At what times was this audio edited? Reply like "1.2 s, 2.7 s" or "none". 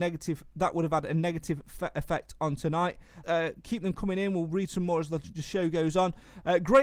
3.2 s